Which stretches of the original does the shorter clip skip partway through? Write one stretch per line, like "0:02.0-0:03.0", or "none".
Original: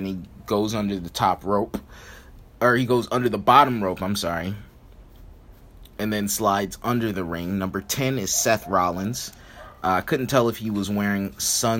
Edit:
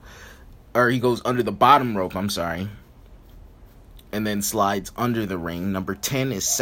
none